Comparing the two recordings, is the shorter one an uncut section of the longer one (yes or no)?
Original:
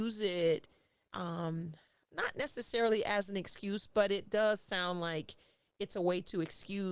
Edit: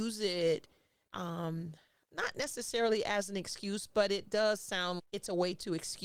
no